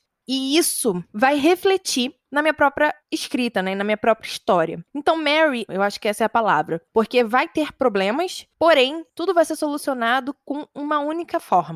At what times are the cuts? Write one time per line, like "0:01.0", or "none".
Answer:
0:05.7